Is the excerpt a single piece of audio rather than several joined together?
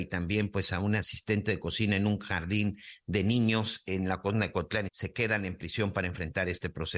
no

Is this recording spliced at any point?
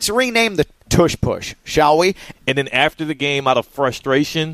yes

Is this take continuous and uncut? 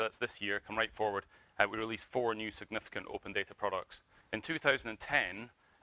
no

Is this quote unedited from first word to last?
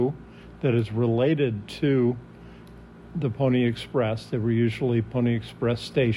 yes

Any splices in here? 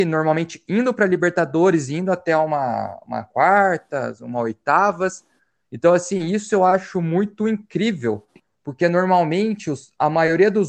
no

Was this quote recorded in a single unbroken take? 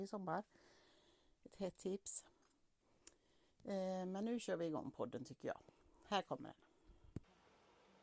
yes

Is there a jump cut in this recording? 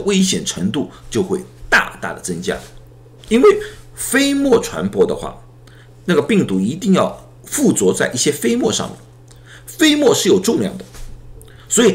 yes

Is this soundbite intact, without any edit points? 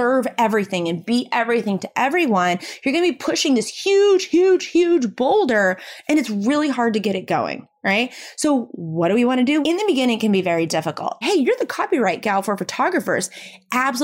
no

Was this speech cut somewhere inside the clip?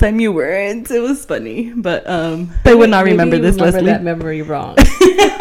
yes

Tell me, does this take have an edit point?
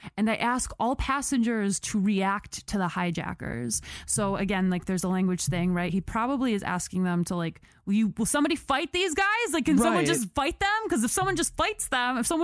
no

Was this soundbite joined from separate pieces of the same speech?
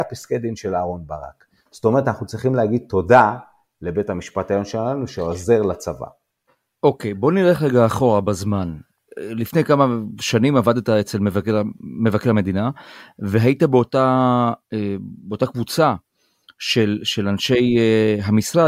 no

